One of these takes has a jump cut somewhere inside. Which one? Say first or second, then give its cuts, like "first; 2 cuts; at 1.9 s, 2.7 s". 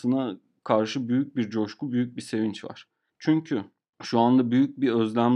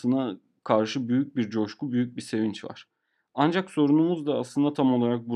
first; 1 cut; at 3.1 s